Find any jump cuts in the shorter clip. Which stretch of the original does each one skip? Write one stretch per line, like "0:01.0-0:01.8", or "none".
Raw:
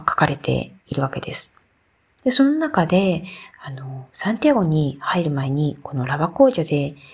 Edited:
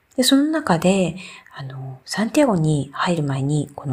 none

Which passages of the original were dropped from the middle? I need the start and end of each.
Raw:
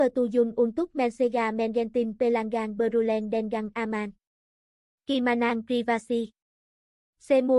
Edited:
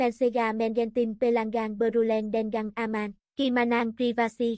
0:04.3-0:05.0

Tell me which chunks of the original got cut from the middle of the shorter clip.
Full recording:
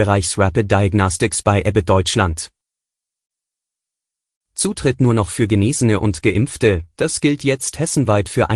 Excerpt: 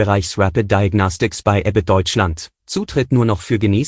0:02.6-0:04.5

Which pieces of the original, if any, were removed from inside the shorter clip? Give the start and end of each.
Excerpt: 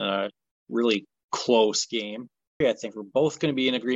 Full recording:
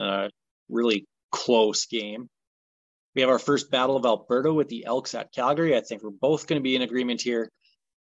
0:02.6-0:05.7

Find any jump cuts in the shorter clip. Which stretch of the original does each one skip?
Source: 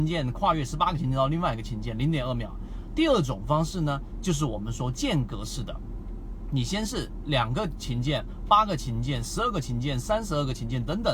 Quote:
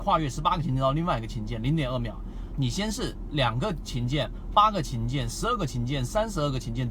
0:02.9-0:06.5

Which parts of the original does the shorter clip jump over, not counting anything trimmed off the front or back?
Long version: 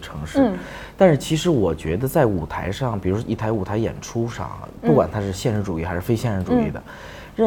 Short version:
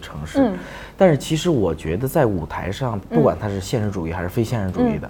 0:03.0-0:04.7

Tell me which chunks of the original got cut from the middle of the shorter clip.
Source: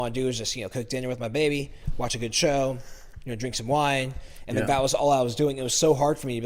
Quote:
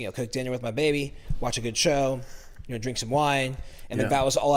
none

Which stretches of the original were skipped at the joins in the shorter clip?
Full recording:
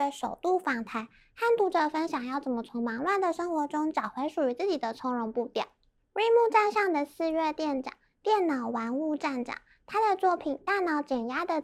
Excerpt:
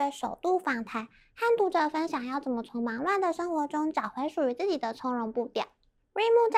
none

